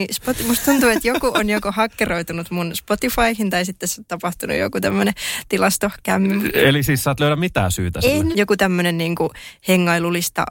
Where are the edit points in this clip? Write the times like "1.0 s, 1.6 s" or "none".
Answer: 8.3 s